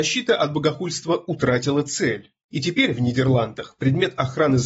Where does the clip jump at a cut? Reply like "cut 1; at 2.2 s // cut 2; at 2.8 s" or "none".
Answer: cut 1; at 2.4 s